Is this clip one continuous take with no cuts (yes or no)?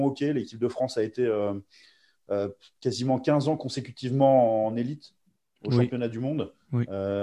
yes